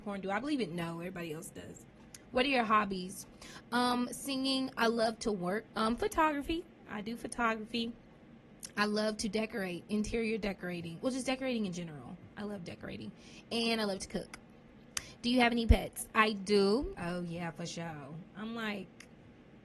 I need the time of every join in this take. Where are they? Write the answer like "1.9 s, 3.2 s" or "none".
5.7 s, 16.9 s